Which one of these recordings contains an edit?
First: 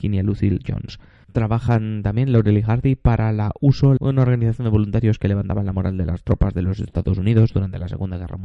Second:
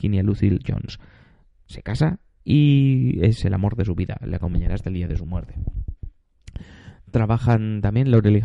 first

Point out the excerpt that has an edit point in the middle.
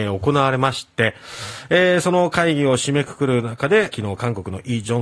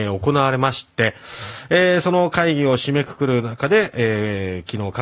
first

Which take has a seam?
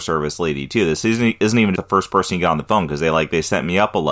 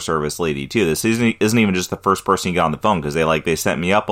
first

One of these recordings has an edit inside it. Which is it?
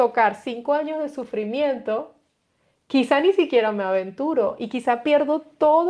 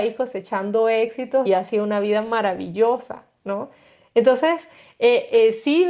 second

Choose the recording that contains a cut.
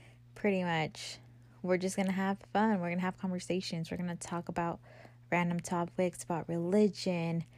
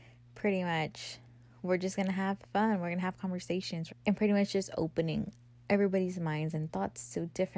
second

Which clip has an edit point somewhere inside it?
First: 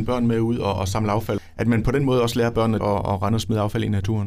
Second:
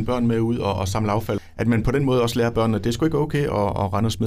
first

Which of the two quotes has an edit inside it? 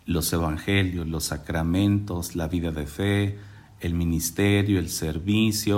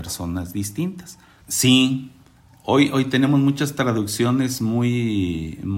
second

